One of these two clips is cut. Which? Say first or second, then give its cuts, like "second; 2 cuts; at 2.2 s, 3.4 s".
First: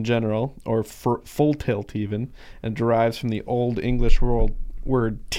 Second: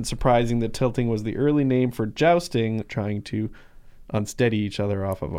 second; 1 cut; at 2.8 s